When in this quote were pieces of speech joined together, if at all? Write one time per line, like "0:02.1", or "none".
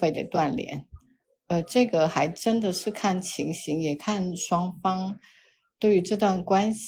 none